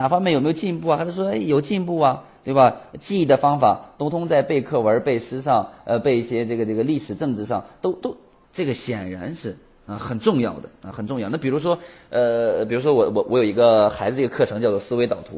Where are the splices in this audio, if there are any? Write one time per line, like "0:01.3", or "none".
0:04.1
0:08.4